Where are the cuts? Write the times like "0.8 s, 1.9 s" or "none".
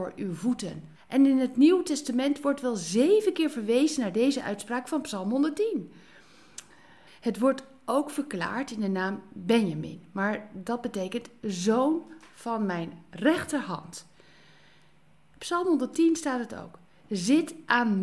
1.0 s, 7.1 s